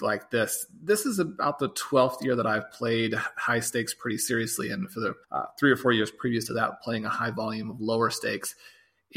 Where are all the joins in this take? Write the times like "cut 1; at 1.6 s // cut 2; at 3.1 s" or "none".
cut 1; at 5.2 s